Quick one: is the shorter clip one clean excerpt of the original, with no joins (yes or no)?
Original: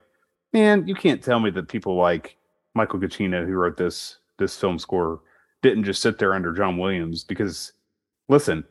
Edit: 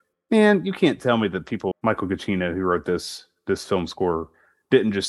no